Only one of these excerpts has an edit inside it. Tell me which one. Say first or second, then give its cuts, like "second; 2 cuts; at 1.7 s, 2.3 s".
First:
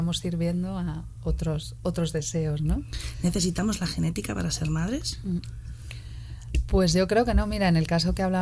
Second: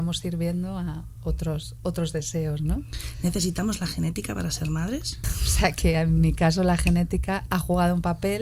second; 1 cut; at 5.2 s